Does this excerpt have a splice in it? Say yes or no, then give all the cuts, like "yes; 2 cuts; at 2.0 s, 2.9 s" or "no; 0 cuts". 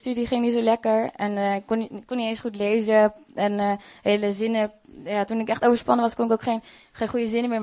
no; 0 cuts